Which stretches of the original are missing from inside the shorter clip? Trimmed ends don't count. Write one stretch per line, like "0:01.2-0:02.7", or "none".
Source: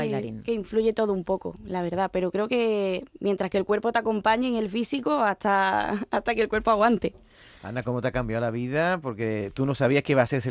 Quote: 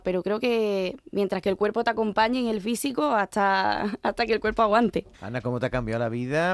0:07.2-0:07.5